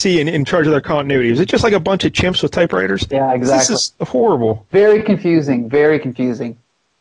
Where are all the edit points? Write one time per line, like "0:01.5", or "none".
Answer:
none